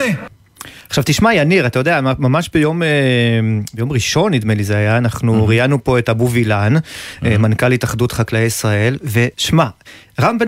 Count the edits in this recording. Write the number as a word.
one